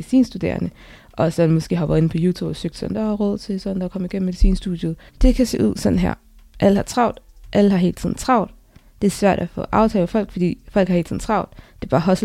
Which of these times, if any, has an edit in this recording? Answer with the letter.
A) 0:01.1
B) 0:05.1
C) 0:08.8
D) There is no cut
B